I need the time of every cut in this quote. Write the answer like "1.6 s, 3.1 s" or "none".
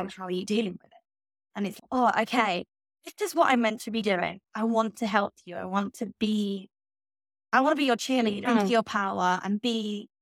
8.4 s